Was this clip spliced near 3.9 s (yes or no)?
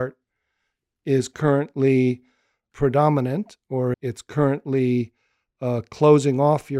yes